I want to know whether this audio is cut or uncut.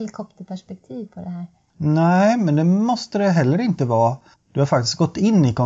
cut